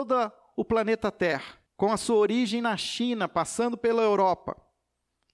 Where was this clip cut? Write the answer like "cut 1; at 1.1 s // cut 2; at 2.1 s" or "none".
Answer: cut 1; at 1.7 s